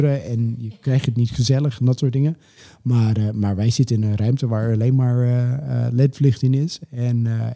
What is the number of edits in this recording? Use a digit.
0